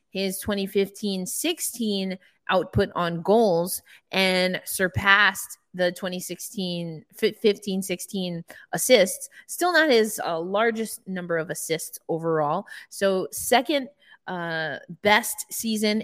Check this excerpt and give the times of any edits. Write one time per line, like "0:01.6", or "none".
none